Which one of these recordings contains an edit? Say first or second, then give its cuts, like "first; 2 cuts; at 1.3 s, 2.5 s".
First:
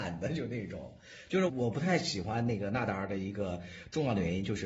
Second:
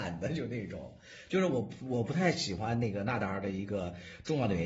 first; 1 cut; at 1.5 s